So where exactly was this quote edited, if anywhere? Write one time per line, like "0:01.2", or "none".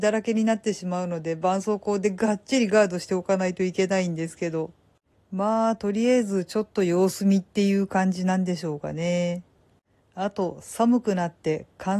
none